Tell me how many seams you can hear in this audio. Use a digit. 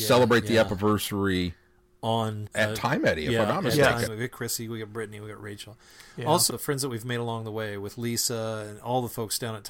3